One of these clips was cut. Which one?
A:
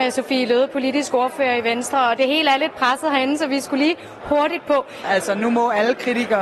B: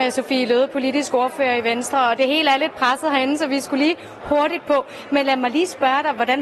A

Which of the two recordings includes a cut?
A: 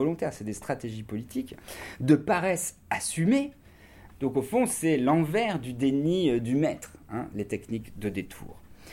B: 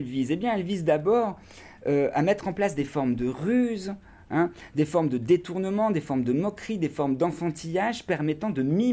A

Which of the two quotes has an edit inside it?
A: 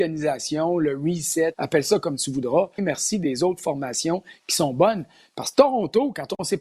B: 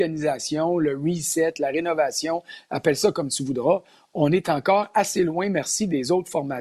A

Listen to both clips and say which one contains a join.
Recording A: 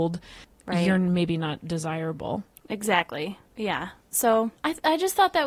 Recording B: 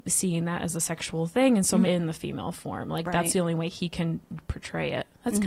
B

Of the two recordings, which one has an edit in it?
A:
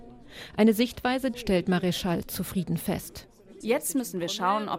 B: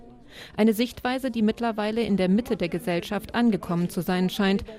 A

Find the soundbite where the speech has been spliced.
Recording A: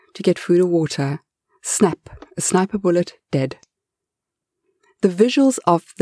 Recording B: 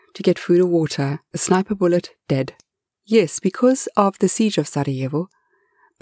B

